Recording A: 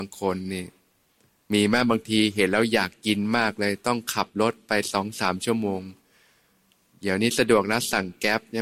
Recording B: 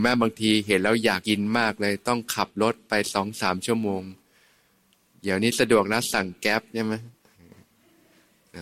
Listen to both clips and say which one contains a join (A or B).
B